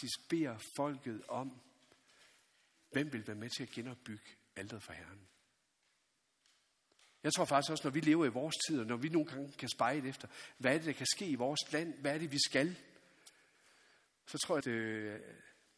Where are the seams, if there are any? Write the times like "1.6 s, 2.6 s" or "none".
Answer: 14.6 s

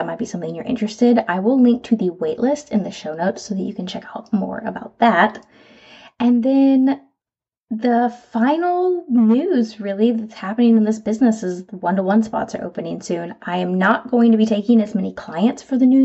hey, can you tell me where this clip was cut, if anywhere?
none

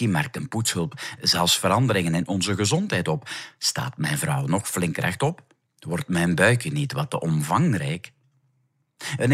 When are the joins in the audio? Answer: none

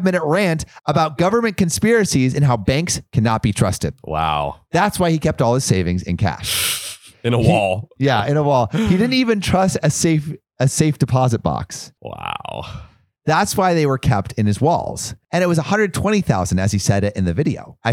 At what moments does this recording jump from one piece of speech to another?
none

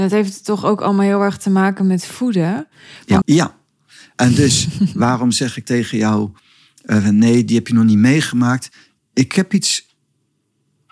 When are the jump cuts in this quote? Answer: 3.2 s

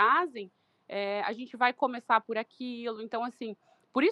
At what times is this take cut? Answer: none

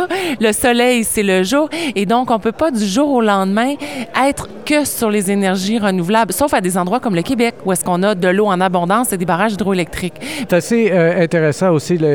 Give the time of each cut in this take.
10.5 s

